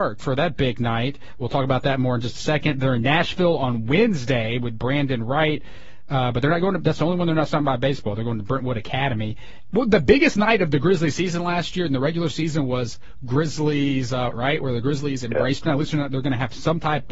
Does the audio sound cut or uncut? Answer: cut